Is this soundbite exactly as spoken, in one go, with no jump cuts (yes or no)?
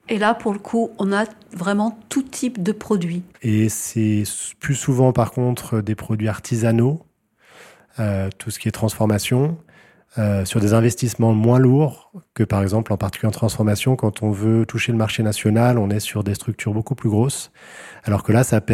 no